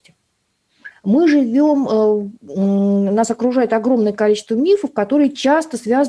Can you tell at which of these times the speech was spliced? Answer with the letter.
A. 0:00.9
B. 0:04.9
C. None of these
A